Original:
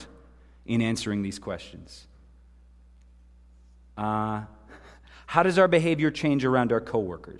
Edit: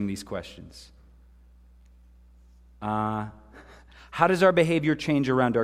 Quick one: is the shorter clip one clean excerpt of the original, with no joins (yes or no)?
yes